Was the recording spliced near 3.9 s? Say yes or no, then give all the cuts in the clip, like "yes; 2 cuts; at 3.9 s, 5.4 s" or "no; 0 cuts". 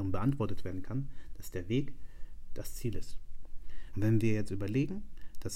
yes; 1 cut; at 3.9 s